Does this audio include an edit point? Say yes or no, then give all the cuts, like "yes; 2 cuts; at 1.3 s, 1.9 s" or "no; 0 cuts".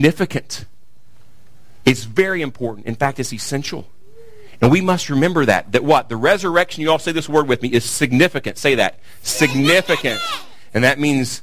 no; 0 cuts